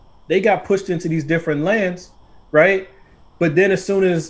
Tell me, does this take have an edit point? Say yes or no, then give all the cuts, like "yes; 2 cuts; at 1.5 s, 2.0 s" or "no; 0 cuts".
no; 0 cuts